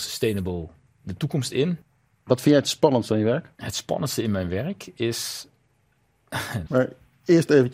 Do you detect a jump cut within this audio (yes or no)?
yes